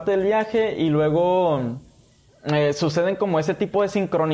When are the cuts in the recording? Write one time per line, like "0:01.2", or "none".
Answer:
none